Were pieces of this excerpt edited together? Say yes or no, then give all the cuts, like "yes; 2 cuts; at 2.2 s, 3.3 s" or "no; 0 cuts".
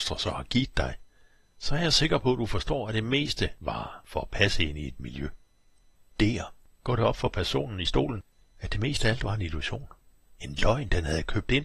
yes; 1 cut; at 6.1 s